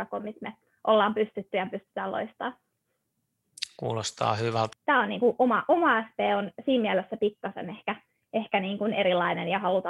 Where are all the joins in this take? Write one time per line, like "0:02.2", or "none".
0:04.7